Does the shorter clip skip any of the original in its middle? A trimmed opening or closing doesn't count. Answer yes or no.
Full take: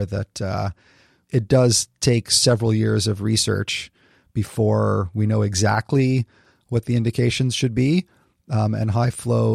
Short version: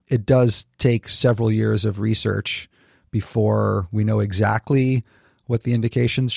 no